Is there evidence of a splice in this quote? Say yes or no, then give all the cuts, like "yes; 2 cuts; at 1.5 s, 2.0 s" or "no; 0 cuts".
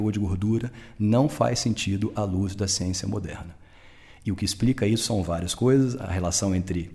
no; 0 cuts